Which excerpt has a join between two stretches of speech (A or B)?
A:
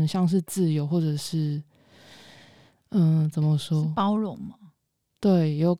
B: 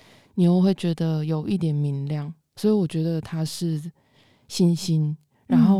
B